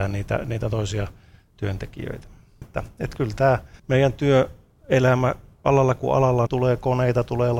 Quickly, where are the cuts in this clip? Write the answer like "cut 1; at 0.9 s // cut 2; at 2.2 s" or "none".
cut 1; at 2.6 s // cut 2; at 3.8 s // cut 3; at 6.5 s